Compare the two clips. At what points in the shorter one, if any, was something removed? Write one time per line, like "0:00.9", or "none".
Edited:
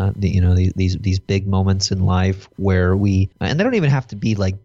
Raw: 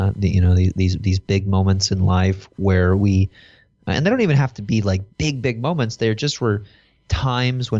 0:03.3